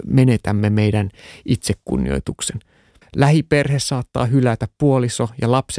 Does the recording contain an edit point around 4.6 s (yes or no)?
no